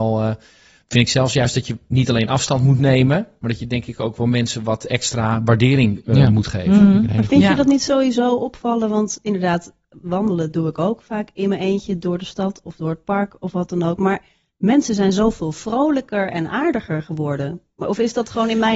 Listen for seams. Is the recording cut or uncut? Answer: uncut